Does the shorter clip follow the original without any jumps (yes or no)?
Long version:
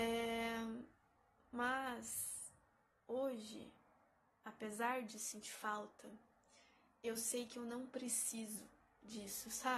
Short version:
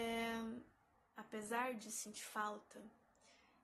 no